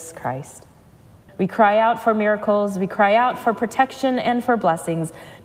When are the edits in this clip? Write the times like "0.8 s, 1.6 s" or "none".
1.3 s